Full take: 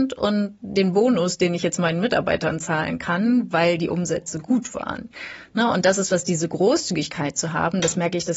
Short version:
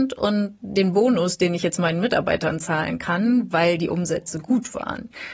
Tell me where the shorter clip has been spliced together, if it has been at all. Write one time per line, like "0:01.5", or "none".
none